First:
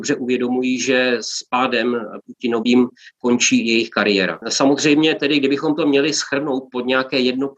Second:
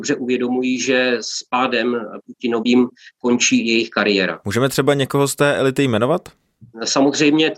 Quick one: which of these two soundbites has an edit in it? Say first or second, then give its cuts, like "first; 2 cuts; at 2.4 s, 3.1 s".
first; 1 cut; at 4.4 s